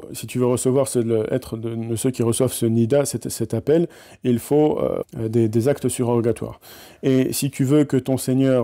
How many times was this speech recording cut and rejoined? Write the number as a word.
one